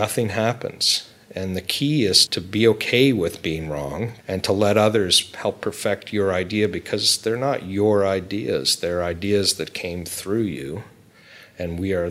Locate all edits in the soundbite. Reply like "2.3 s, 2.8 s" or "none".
4.2 s